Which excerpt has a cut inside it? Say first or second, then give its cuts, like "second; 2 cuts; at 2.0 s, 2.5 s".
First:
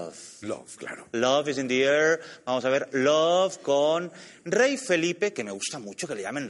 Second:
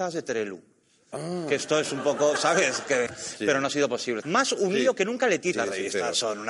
second; 3 cuts; at 3.1 s, 4.2 s, 5.5 s